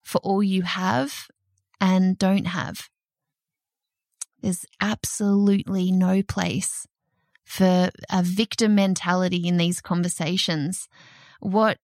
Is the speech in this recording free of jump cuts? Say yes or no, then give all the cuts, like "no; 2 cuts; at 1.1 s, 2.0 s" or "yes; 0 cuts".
yes; 0 cuts